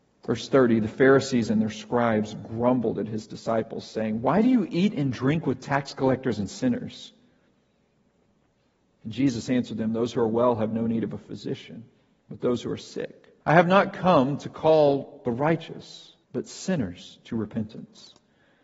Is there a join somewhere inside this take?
yes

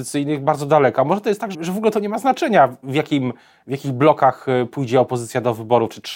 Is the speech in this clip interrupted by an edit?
yes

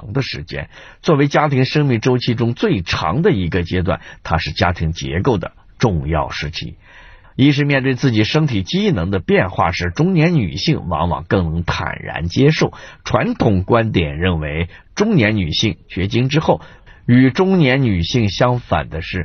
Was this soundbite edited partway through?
yes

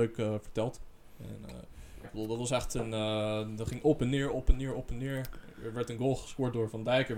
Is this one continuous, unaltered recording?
no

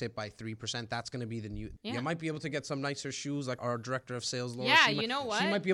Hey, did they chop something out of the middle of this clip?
yes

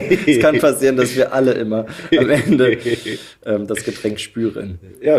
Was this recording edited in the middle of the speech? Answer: no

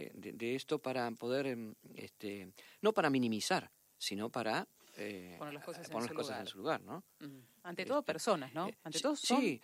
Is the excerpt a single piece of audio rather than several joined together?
yes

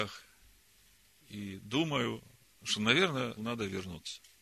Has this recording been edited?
yes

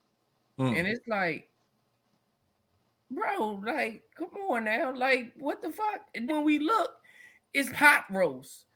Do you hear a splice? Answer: yes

